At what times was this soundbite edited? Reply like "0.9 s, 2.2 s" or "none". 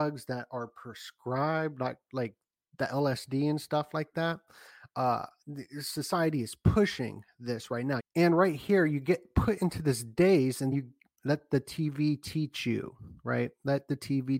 8.0 s, 10.7 s